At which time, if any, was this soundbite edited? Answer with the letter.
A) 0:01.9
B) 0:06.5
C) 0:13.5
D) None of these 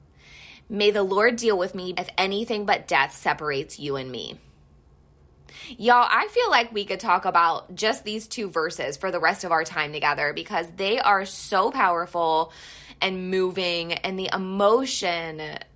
A